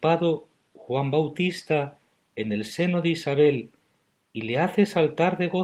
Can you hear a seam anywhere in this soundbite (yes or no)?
no